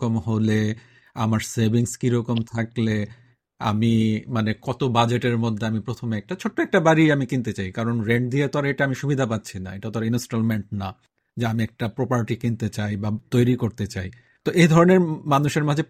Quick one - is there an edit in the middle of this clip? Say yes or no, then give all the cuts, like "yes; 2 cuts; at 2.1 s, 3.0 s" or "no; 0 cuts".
no; 0 cuts